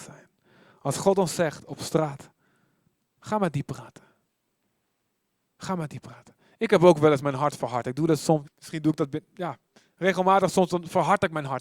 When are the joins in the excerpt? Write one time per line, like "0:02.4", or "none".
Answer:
0:08.4